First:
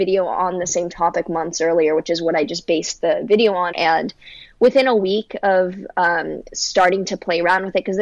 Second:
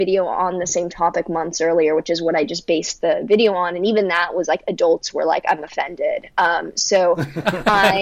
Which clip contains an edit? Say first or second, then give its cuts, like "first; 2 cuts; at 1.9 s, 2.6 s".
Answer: first; 1 cut; at 3.7 s